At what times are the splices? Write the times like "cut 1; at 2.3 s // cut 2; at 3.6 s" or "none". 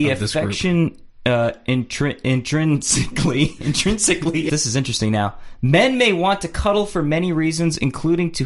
cut 1; at 4.5 s